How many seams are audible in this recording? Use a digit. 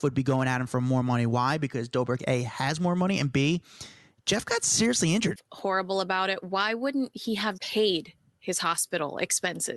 2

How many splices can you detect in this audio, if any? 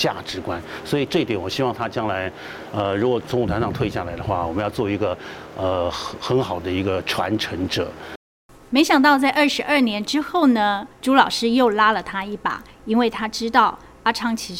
1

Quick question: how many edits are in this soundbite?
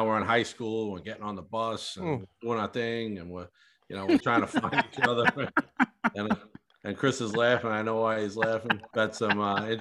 2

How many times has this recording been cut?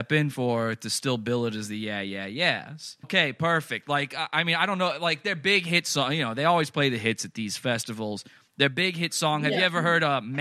1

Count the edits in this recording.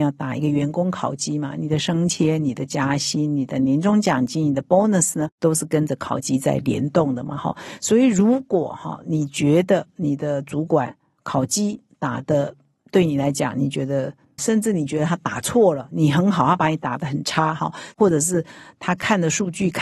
1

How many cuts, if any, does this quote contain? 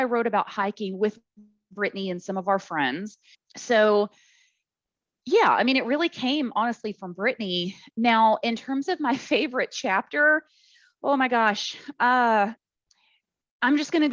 1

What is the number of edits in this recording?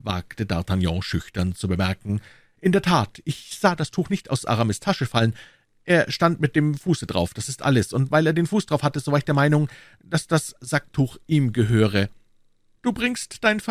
1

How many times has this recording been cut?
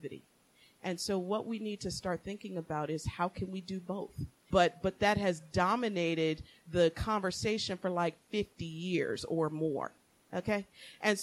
1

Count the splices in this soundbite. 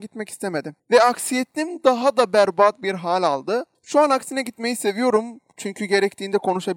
0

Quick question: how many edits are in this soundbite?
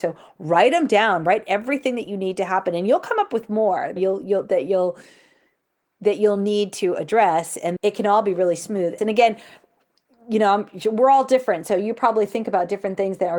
3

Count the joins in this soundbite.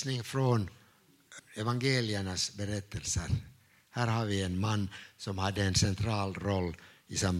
1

